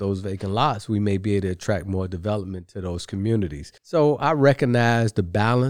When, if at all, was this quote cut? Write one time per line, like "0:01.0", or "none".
0:03.8